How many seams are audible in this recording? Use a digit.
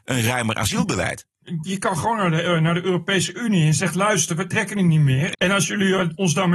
1